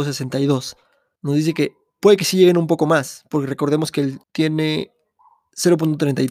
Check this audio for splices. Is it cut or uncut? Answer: cut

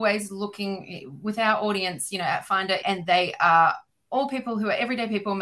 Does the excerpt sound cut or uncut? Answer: cut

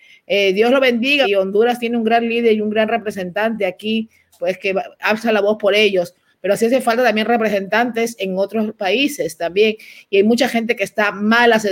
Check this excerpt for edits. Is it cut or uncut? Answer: cut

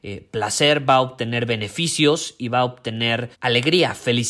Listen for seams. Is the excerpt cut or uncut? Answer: cut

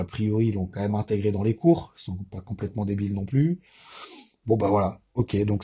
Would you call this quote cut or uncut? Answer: cut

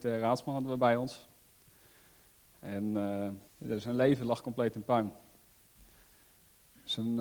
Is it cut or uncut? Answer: cut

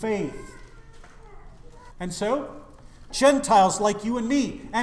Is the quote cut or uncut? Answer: cut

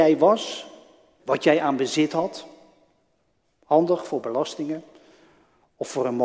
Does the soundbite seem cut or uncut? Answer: cut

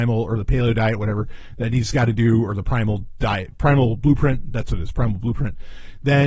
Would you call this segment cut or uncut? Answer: uncut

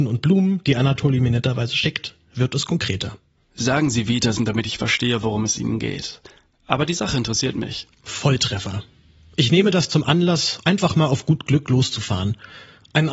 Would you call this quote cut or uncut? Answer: cut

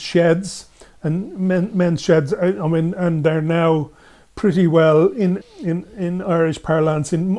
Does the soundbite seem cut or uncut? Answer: cut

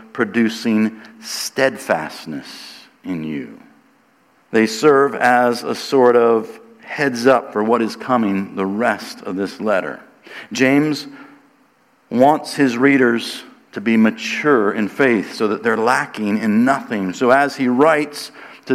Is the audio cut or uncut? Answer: cut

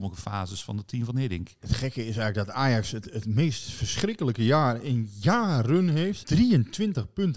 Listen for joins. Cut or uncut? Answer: cut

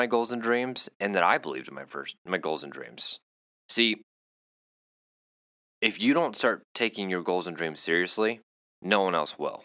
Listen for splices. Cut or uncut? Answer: uncut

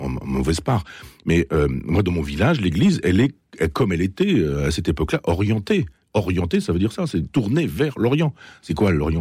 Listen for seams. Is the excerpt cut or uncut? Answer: uncut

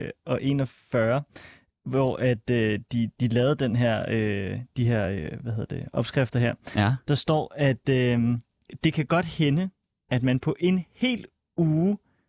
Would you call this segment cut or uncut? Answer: uncut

